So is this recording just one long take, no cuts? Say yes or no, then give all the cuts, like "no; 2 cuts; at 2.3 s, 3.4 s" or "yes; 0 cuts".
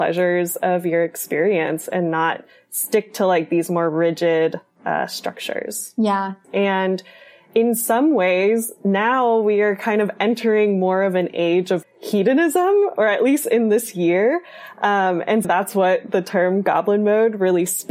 no; 3 cuts; at 6.4 s, 11.8 s, 15.4 s